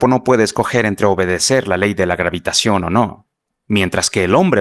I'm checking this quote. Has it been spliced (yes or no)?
no